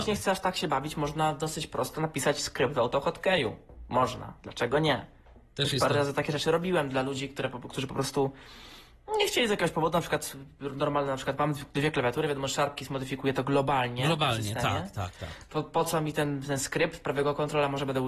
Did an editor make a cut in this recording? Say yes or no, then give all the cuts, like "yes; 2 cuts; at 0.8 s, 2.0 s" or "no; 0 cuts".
yes; 2 cuts; at 5.5 s, 15.5 s